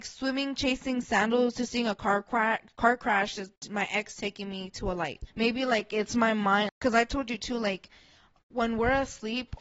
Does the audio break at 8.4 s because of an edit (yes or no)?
no